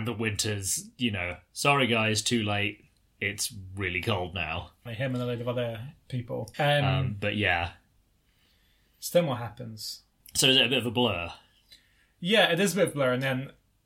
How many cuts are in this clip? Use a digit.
3